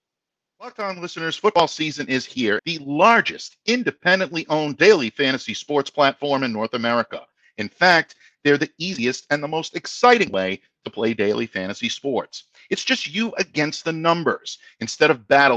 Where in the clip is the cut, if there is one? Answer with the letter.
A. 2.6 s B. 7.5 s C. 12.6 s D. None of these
A